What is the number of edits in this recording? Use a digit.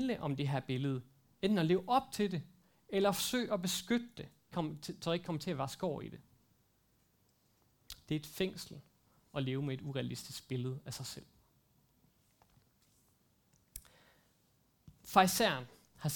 1